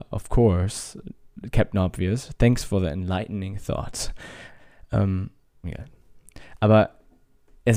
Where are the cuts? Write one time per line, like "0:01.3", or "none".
0:05.6